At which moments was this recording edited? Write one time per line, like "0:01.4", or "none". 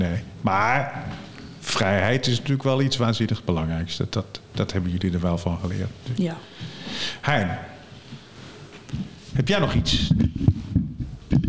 0:04.1